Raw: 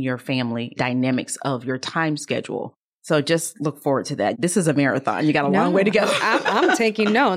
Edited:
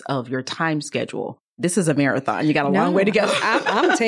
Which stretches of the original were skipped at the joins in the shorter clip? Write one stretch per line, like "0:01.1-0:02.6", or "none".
0:02.9-0:04.4